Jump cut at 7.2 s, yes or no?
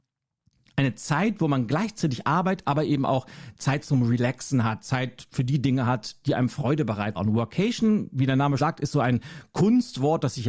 yes